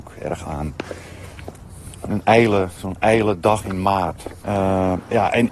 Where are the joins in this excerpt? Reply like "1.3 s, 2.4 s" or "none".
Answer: 4.4 s